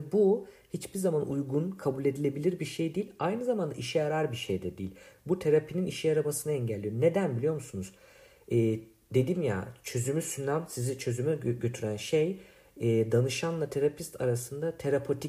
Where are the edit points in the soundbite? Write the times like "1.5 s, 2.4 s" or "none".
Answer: none